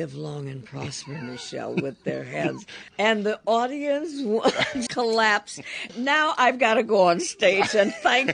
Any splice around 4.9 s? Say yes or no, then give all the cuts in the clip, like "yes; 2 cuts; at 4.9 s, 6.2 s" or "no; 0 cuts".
yes; 2 cuts; at 2.9 s, 4.9 s